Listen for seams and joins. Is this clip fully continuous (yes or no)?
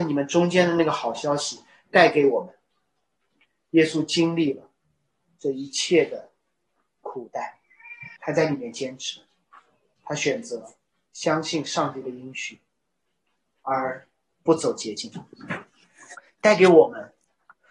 no